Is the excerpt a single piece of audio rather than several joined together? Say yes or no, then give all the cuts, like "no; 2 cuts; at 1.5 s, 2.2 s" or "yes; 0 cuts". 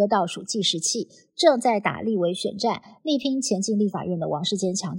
yes; 0 cuts